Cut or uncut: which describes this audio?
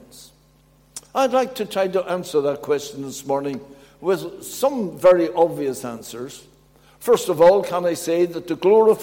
uncut